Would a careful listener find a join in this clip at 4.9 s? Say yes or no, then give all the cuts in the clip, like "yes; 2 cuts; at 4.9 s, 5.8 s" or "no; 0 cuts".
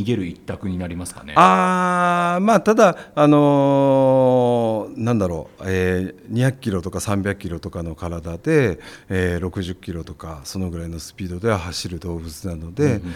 yes; 1 cut; at 4.9 s